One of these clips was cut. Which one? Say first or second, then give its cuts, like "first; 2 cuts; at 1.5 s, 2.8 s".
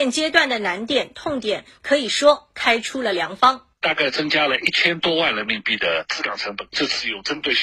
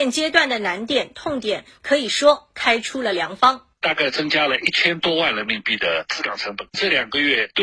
second; 1 cut; at 6.7 s